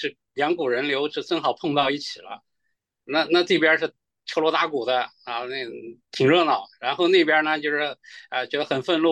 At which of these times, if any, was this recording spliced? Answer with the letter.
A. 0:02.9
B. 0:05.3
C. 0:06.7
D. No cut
D